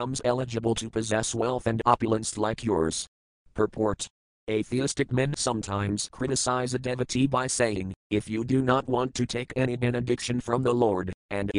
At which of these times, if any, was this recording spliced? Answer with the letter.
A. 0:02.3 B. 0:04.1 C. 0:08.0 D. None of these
D